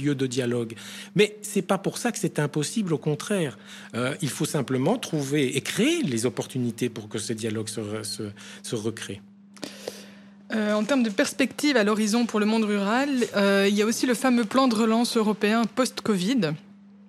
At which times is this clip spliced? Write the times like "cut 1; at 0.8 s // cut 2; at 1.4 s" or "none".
none